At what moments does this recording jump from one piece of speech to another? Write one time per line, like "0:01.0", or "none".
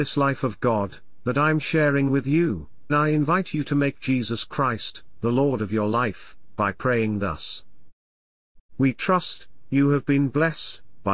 0:02.9
0:08.6